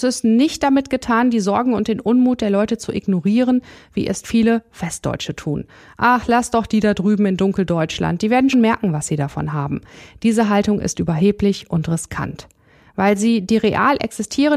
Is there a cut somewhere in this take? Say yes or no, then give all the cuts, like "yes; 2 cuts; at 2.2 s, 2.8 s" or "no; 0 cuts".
yes; 1 cut; at 8.5 s